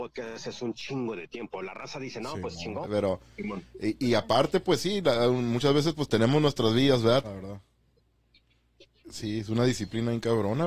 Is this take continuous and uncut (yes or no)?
no